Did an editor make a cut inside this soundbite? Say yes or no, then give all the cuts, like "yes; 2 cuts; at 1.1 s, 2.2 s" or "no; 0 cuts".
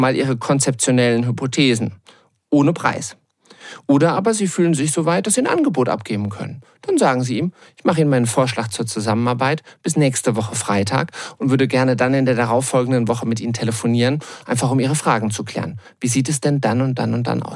no; 0 cuts